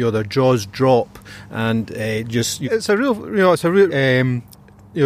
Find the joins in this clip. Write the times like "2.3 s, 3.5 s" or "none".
2.6 s, 3.9 s